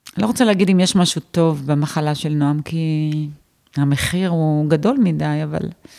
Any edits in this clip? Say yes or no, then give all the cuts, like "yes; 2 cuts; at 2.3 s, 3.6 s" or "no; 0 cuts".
no; 0 cuts